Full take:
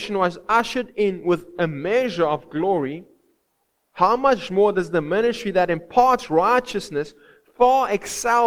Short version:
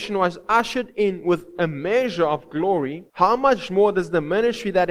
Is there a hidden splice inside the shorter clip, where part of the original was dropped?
yes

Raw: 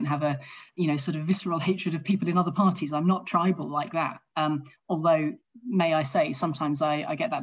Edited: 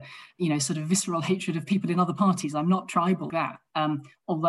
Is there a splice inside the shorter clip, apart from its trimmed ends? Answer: yes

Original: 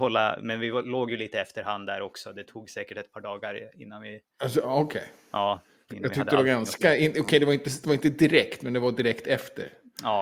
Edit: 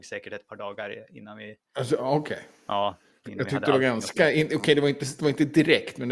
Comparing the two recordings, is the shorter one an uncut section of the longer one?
yes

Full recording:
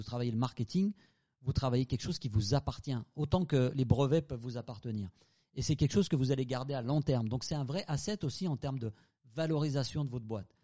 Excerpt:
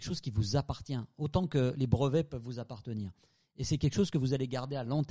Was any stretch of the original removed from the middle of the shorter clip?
no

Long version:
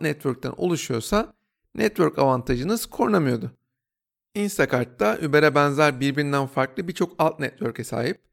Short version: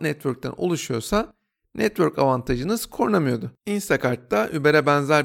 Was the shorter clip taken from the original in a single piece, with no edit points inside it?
no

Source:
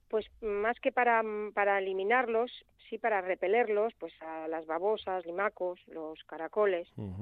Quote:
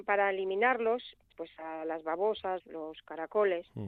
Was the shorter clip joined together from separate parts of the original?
yes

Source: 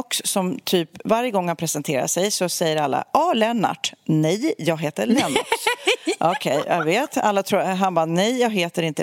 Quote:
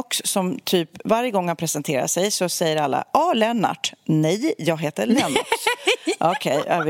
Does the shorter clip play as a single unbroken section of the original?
yes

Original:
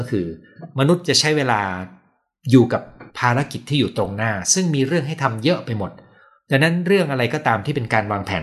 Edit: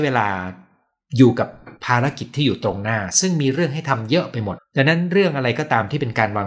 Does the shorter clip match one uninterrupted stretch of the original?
no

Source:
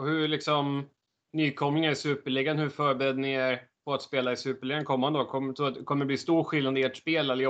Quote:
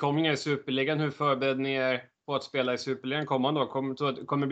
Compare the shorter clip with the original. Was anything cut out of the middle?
no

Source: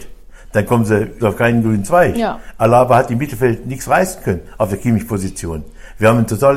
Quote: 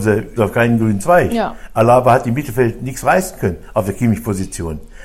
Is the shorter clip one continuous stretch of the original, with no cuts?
yes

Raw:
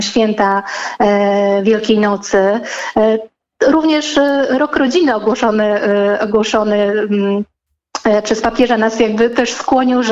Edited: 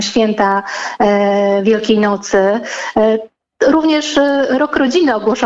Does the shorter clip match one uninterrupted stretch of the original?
yes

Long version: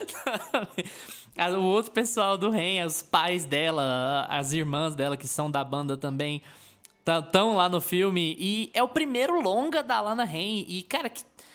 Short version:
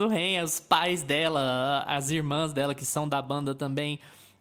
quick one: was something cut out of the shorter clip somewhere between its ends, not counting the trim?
no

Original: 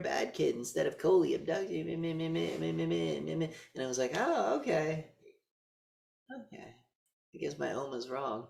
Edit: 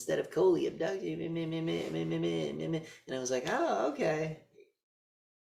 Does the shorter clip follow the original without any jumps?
yes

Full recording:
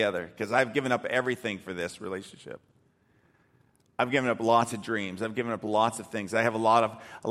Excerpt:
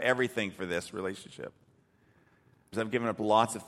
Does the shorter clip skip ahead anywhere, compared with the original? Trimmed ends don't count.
yes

